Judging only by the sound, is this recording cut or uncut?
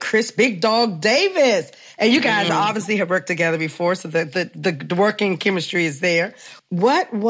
uncut